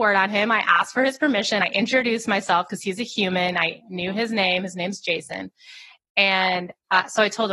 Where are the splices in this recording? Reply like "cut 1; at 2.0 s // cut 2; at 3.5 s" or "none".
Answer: none